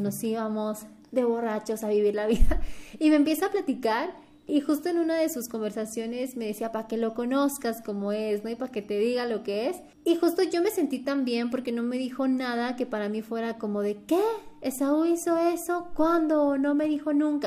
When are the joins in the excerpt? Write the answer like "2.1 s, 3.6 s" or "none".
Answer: 4.5 s, 9.9 s